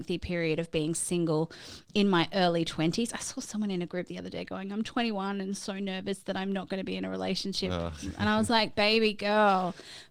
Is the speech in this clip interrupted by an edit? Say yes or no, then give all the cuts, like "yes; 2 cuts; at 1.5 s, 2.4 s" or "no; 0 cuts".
no; 0 cuts